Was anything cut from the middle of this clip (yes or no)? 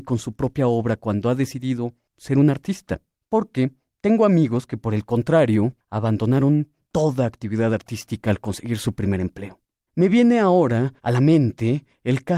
yes